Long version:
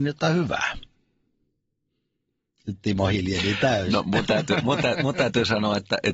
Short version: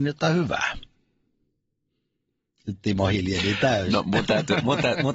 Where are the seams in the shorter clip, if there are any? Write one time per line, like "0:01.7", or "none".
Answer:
none